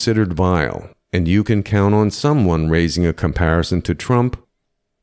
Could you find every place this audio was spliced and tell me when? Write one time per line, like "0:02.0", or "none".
none